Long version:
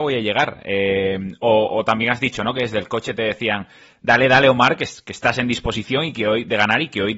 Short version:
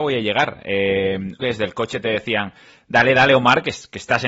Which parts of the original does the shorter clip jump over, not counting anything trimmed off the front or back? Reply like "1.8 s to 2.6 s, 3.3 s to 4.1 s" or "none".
1.4 s to 2.5 s

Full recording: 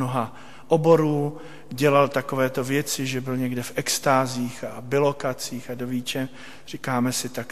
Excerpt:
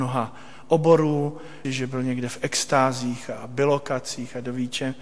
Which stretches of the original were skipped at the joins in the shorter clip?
1.6 s to 3.0 s

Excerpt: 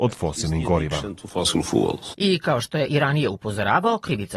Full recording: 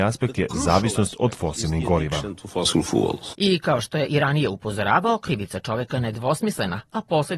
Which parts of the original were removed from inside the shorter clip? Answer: none

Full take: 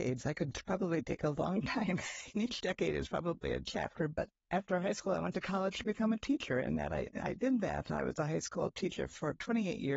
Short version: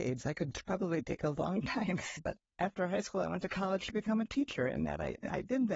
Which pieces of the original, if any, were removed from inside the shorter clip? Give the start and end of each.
2.2 s to 4.1 s

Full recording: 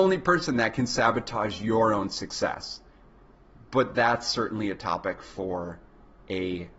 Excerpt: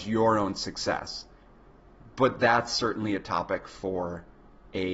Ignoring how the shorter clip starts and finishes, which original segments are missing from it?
none

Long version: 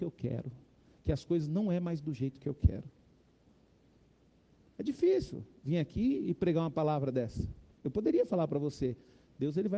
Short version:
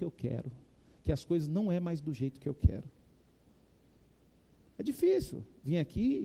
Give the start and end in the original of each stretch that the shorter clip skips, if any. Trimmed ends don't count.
none

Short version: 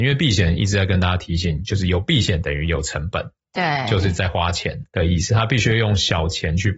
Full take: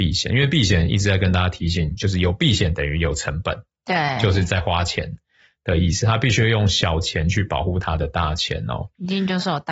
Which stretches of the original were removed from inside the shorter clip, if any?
5.2 s to 5.6 s

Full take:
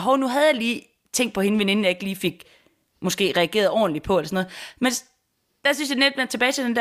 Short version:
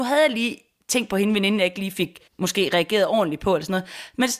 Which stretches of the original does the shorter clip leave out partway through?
2.5 s to 2.9 s

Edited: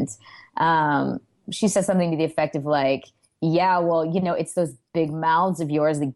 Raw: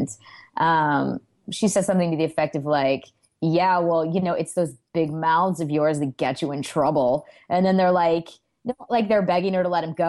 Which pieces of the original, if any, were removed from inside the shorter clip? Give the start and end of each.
none

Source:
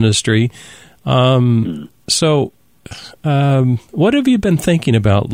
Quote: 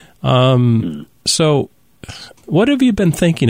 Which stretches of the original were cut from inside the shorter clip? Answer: 3.2 s to 3.8 s

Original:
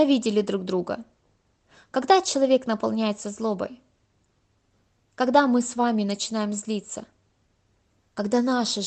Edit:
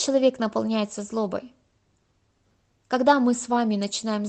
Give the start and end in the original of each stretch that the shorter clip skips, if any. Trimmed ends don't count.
none

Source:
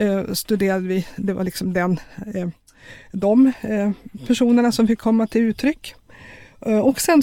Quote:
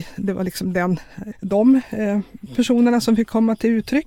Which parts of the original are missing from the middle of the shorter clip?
2.3 s to 3.0 s

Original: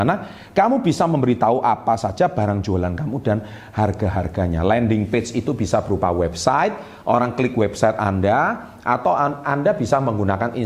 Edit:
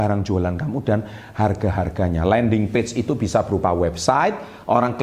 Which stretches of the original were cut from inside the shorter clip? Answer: none

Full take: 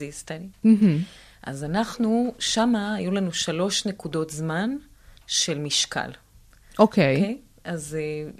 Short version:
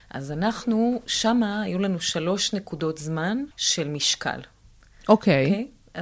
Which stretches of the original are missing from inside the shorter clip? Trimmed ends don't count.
4.8 s to 5.2 s

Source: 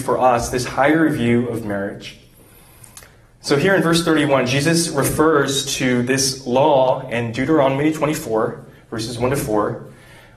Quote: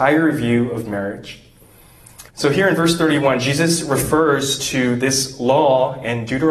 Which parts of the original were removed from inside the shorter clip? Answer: 3.1 s to 3.3 s

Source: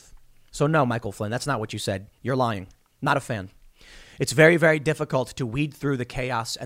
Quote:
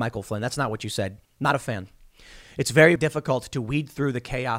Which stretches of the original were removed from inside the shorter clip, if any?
2.1 s to 2.9 s, 4.6 s to 4.8 s

